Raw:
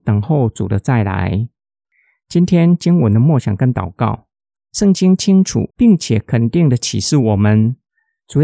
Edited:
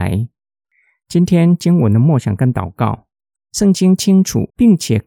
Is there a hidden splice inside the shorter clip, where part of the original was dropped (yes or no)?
no